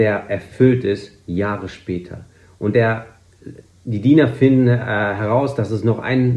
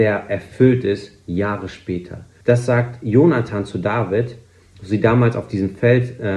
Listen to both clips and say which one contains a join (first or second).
second